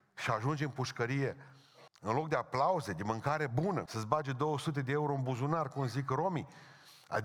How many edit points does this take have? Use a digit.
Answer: 2